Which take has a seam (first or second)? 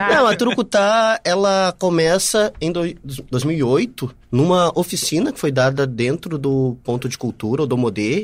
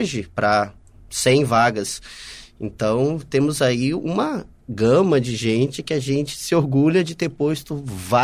first